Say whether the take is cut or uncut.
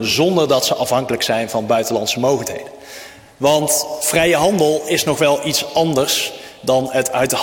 uncut